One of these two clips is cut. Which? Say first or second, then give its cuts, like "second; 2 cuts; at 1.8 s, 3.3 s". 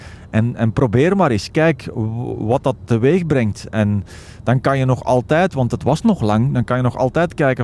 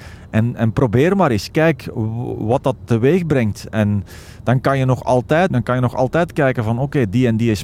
second; 1 cut; at 5.5 s